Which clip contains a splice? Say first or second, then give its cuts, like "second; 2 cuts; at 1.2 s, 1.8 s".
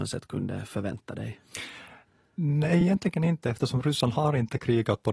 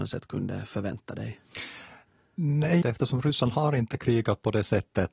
second; 1 cut; at 2.8 s